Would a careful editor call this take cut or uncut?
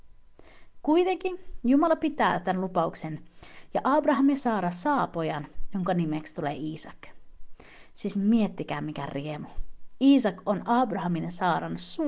uncut